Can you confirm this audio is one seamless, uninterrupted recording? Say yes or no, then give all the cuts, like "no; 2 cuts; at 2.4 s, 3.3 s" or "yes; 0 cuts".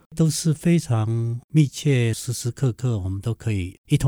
no; 1 cut; at 2.1 s